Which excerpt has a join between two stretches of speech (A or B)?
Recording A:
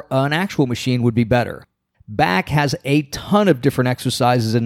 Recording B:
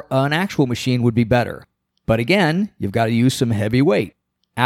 A